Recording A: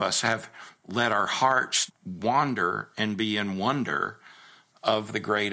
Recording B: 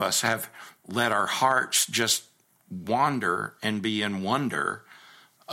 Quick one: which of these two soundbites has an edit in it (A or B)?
A